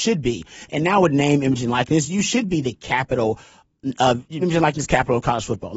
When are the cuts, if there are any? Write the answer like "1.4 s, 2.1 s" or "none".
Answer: 4.4 s